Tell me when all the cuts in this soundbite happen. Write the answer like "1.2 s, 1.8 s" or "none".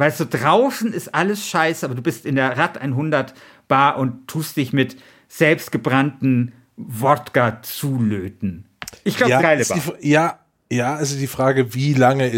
9.4 s